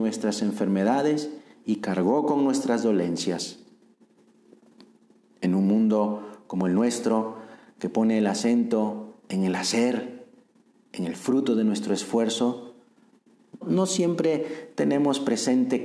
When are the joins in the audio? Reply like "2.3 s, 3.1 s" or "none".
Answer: 13.6 s